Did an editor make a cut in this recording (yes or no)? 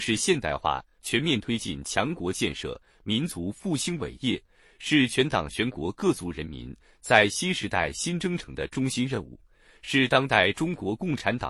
no